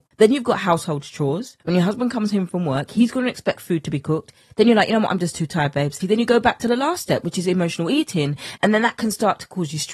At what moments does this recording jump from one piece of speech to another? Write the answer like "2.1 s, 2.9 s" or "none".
6.0 s, 8.6 s